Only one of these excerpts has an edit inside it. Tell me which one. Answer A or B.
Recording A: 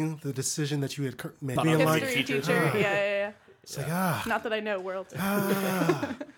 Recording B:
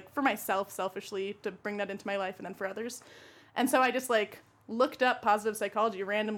A